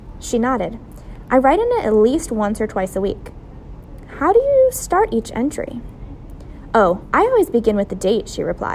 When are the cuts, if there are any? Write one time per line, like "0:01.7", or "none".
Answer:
none

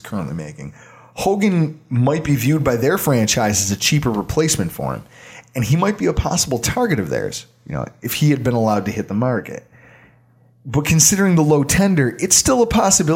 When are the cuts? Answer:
none

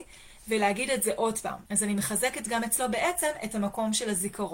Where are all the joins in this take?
0:01.7

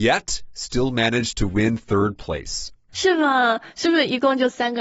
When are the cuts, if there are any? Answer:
none

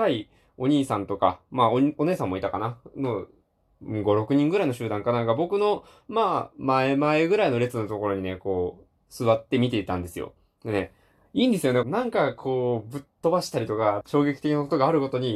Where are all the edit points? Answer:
0:11.8
0:14.0

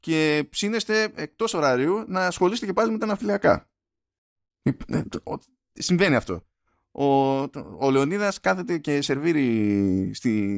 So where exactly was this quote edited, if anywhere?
none

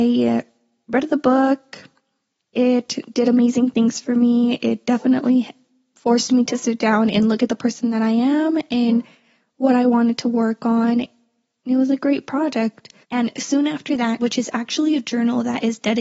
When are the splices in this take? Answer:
0:13.0
0:14.2

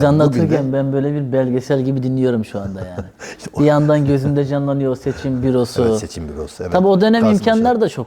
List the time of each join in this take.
none

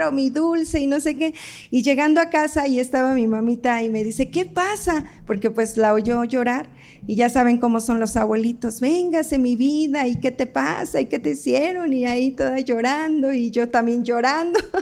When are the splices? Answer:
none

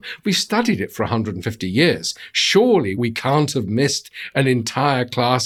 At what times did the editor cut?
none

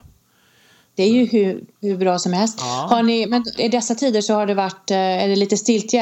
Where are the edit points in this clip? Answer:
0:03.6

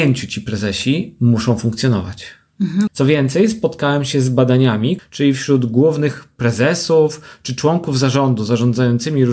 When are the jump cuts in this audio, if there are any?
0:02.9
0:05.0

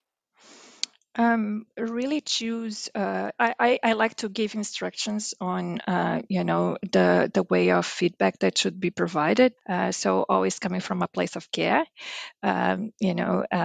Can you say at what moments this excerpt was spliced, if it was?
0:09.6

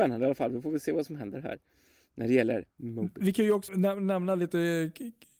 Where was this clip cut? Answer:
0:03.7

